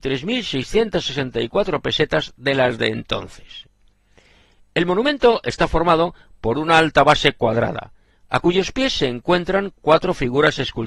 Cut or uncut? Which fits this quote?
uncut